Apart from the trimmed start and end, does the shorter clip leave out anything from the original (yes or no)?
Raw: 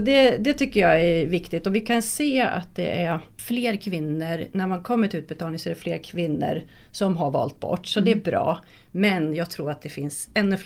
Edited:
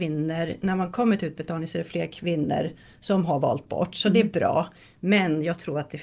no